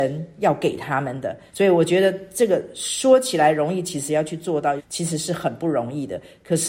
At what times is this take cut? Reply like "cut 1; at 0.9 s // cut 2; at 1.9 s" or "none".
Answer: cut 1; at 1.5 s // cut 2; at 4.8 s